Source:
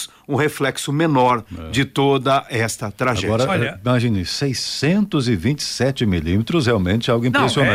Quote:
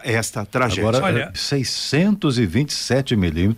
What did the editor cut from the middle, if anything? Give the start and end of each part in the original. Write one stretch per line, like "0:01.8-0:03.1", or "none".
0:03.8-0:04.2